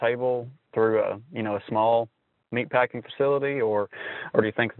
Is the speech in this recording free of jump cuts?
yes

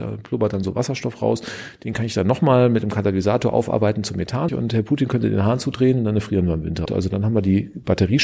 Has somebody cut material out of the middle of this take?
yes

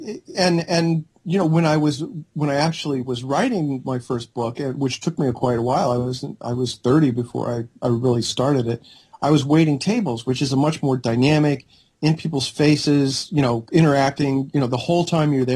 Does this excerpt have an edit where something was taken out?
no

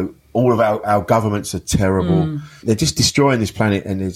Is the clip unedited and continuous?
no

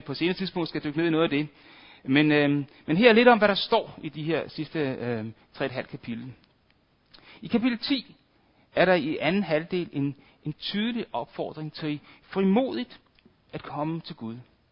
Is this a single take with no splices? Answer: yes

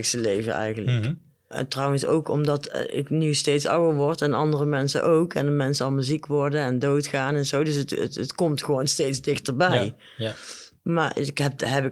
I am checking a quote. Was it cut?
no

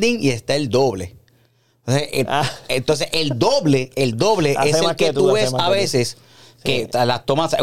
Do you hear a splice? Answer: no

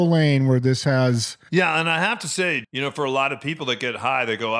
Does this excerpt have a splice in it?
yes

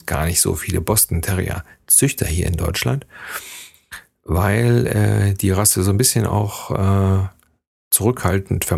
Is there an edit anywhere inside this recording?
no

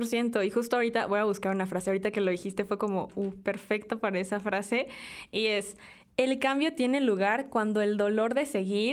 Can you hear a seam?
no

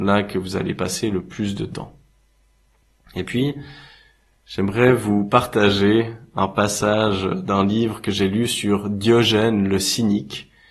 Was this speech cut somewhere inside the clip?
no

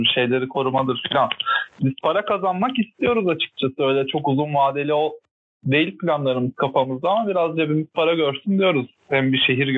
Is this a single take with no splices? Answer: yes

